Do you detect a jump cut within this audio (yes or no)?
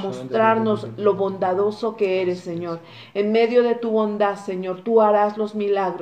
no